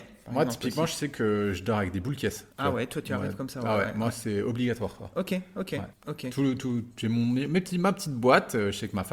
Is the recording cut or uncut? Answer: cut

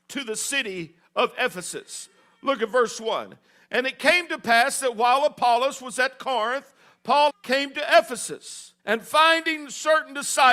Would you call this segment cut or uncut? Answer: cut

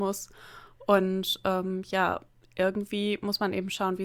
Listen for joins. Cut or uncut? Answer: uncut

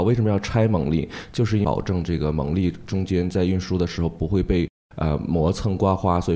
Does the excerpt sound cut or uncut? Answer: uncut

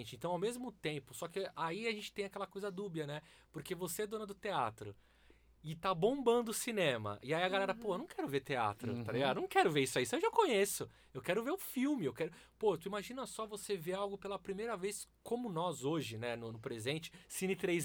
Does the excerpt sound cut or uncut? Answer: uncut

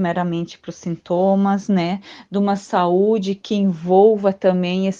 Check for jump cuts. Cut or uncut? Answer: uncut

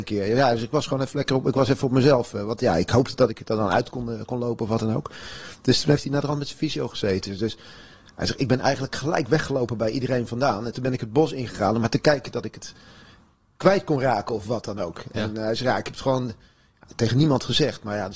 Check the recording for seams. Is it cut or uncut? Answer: cut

